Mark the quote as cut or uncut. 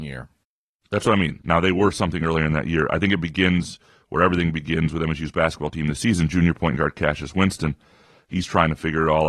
cut